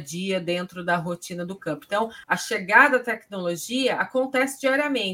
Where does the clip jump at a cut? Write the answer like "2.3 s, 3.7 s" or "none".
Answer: 2.2 s